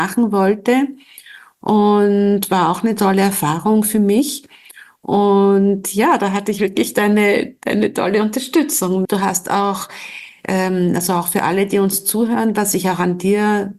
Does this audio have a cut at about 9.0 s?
yes; 1 cut; at 9.0 s

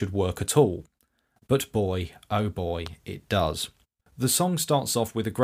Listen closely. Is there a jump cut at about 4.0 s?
yes; 1 cut; at 4.0 s

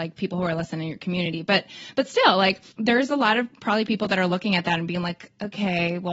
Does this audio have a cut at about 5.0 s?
no; 1 cut; at 2.7 s

